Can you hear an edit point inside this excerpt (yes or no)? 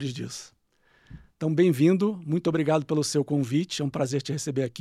yes